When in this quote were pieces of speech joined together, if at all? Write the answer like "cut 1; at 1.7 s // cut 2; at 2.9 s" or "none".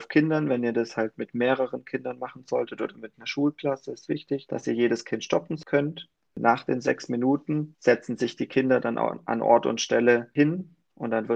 cut 1; at 6.3 s